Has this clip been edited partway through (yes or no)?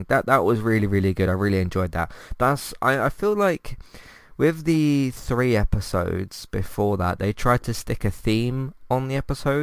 no